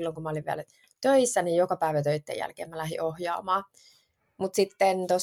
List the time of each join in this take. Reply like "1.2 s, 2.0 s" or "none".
none